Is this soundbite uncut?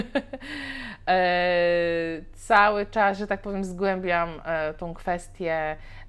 yes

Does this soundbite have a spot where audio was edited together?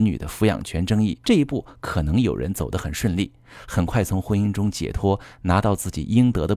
yes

